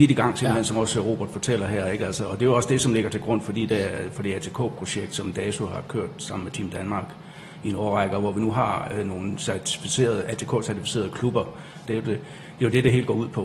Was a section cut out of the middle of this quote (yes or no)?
yes